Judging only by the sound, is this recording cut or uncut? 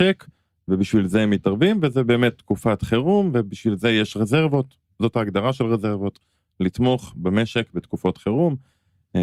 uncut